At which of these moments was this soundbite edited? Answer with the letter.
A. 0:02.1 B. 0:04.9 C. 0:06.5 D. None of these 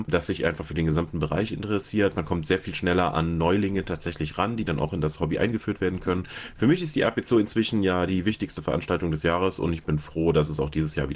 D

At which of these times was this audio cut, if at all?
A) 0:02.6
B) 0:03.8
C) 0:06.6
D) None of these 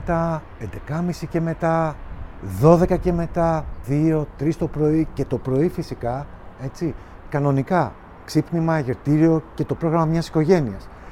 B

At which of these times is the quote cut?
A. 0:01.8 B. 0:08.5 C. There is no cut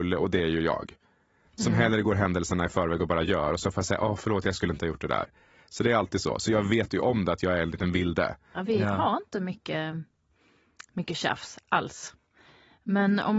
B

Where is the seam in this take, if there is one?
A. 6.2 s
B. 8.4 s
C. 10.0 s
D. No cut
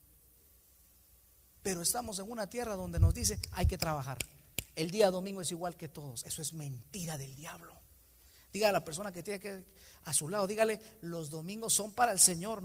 D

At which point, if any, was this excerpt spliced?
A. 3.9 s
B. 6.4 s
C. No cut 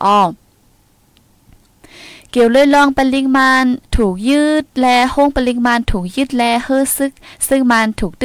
A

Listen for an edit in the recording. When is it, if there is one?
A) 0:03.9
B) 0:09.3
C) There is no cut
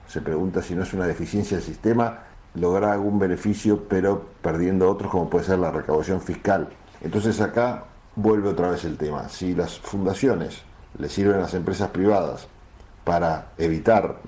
C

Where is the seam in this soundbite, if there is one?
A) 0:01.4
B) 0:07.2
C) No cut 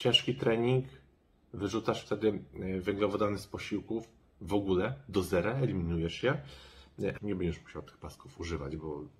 B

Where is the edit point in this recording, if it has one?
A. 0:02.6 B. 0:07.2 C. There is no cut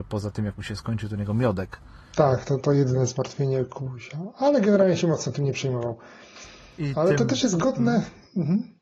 A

